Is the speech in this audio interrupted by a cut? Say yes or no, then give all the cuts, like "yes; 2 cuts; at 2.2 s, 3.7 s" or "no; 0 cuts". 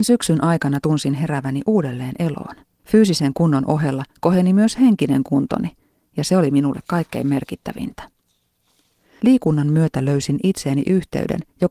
yes; 2 cuts; at 2.8 s, 9.2 s